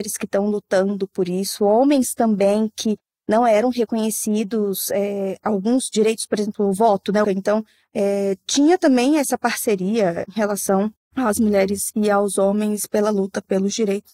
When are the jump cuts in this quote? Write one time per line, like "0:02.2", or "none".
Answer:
0:07.2